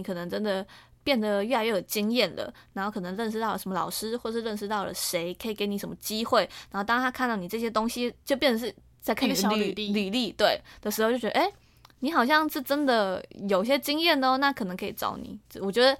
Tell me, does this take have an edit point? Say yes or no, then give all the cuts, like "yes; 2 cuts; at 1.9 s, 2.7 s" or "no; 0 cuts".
no; 0 cuts